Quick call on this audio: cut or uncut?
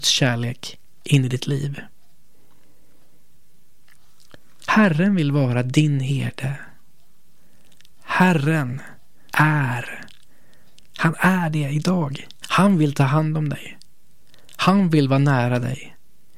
cut